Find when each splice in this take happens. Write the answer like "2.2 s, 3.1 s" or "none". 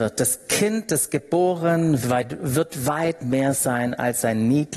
2.0 s